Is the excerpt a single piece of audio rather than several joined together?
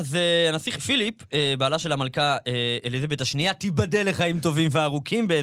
yes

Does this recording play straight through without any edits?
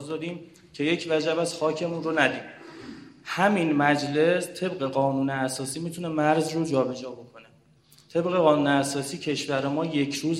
yes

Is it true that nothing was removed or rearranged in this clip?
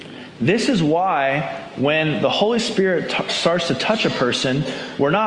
yes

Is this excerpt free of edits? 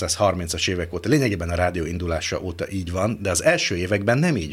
yes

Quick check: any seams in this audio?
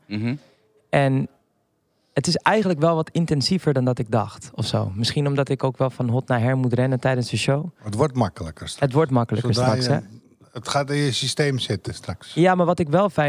no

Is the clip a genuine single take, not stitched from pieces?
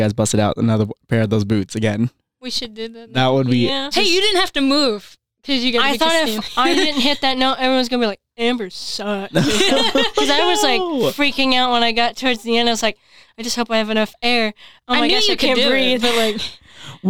no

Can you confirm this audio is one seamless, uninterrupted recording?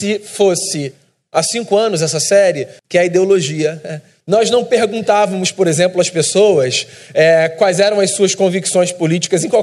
no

